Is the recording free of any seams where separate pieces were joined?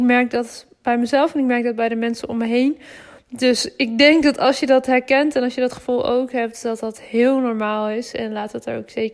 yes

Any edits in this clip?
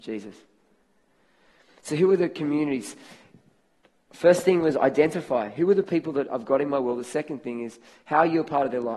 no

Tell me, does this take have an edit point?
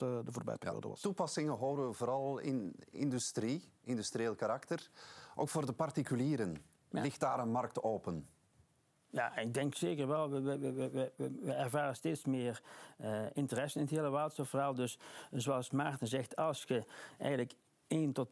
no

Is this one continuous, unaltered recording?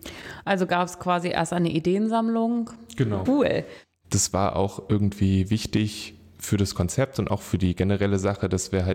no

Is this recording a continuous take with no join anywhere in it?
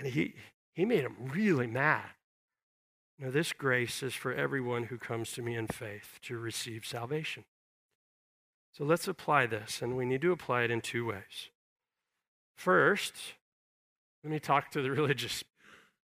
no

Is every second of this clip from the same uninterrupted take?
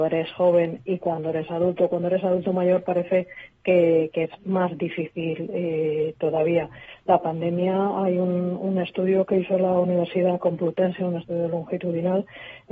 yes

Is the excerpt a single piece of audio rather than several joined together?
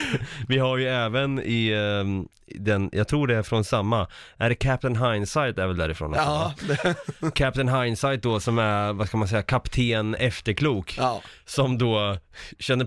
yes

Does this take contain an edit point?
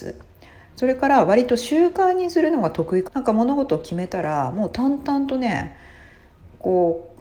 yes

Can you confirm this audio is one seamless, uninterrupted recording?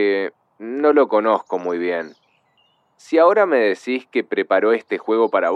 yes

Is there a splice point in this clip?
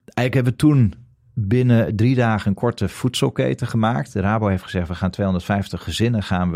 no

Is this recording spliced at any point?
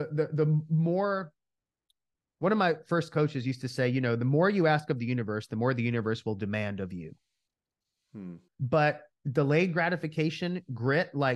yes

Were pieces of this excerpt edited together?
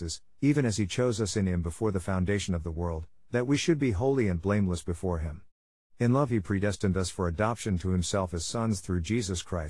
no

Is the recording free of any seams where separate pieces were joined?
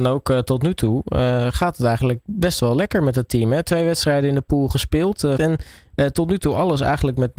no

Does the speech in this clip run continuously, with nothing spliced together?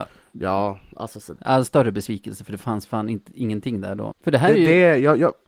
no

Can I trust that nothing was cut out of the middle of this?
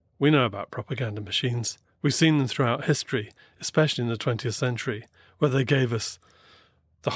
yes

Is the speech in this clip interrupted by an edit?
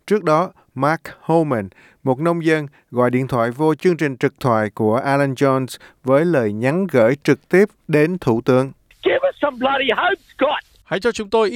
no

